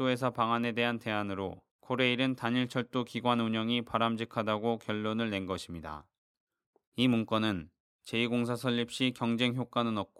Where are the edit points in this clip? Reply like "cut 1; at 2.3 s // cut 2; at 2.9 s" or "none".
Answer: cut 1; at 1.7 s